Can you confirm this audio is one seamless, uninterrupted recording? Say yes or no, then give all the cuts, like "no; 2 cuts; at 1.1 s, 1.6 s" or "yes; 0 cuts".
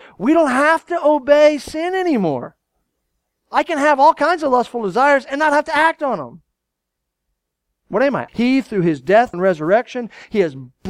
no; 2 cuts; at 8.3 s, 9.3 s